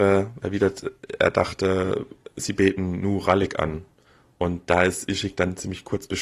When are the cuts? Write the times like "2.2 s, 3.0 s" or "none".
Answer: none

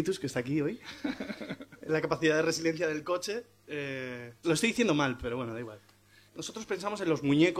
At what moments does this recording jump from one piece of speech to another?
4.4 s, 6.3 s

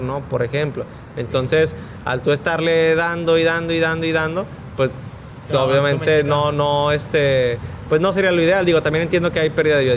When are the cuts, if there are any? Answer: none

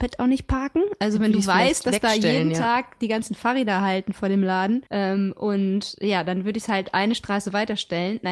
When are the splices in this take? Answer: 4.9 s

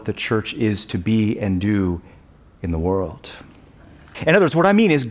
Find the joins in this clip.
4.1 s

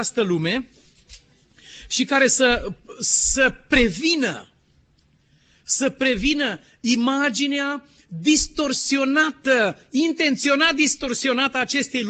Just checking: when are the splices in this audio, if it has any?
none

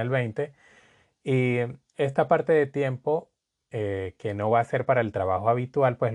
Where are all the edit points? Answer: none

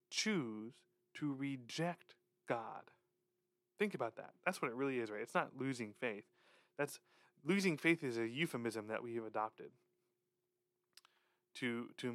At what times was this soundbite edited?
none

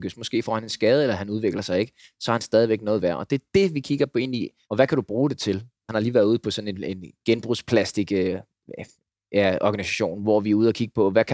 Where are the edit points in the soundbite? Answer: 4.6 s, 5.9 s

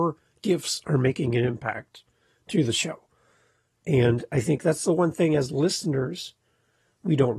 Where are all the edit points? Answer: none

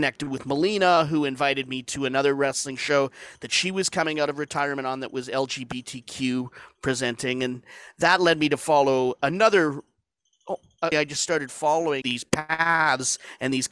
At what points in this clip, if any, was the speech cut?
10.9 s, 12.0 s

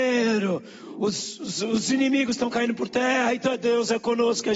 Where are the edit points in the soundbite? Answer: none

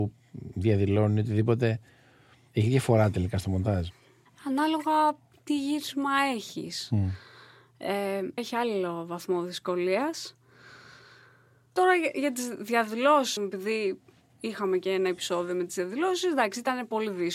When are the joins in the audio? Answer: 8.4 s, 13.4 s

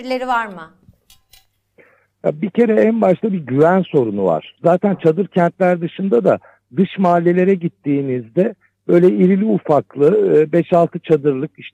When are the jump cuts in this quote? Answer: 4.6 s

